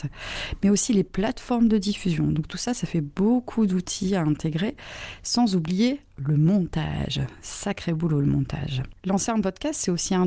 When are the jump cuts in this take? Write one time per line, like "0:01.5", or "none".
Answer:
none